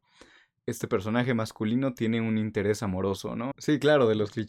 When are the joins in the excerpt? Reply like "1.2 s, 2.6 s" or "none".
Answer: 3.5 s